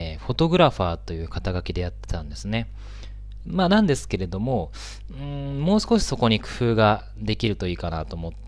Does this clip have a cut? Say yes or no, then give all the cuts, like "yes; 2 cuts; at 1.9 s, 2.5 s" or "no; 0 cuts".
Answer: yes; 1 cut; at 3.4 s